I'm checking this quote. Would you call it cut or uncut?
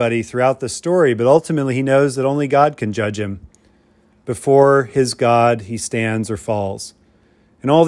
uncut